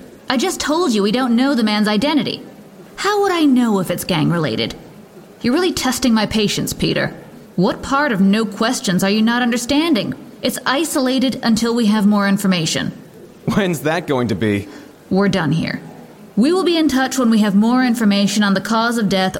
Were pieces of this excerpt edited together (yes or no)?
yes